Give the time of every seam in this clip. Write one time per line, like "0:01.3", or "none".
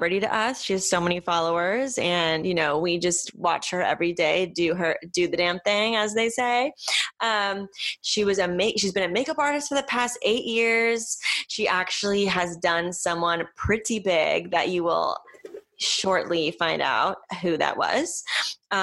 none